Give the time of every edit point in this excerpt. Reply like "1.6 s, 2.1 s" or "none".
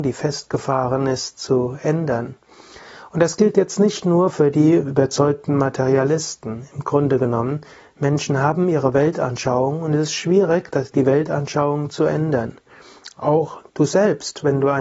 none